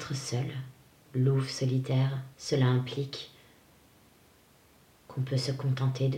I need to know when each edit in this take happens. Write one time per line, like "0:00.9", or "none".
0:01.1
0:02.3